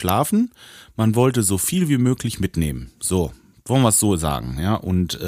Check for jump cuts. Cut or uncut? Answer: uncut